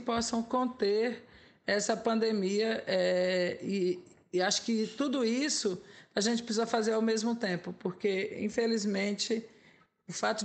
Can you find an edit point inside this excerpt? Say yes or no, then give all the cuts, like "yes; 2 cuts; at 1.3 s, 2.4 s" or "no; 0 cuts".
no; 0 cuts